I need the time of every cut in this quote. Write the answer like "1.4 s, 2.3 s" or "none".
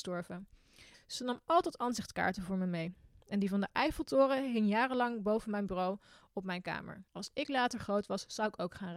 0.9 s, 7.1 s